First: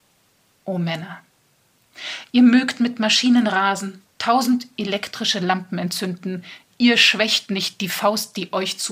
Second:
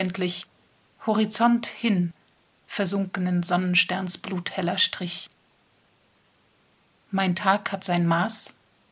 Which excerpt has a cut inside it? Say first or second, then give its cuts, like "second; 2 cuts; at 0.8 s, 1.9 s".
first; 1 cut; at 4.1 s